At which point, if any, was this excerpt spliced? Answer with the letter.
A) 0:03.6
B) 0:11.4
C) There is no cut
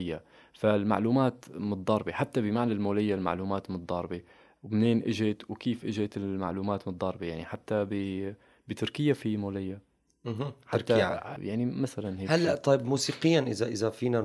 B